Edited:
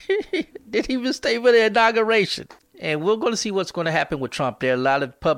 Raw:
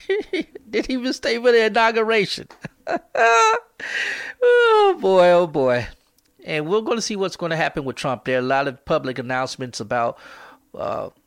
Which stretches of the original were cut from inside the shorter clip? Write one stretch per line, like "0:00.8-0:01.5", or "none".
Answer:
0:02.6-0:06.2

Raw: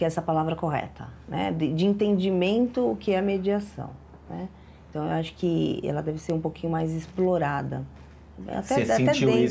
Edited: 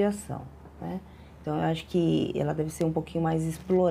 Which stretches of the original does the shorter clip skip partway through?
none

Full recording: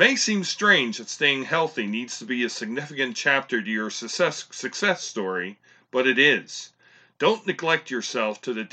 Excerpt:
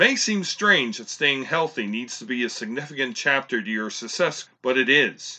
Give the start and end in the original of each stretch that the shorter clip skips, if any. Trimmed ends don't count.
0:04.5-0:05.8

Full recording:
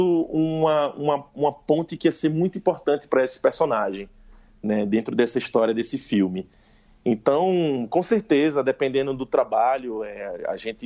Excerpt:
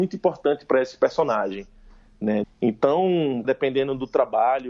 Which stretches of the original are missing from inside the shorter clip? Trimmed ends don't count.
0:04.9-0:06.9
0:07.9-0:08.6

